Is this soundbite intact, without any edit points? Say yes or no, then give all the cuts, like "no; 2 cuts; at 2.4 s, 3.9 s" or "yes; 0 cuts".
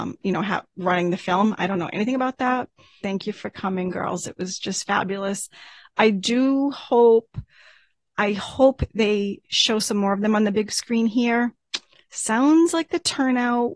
no; 1 cut; at 3.0 s